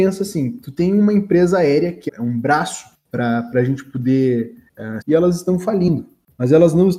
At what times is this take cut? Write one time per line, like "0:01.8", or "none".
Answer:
0:02.1
0:05.0